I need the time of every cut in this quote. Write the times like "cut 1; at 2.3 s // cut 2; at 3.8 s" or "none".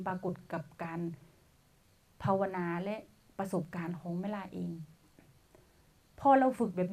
none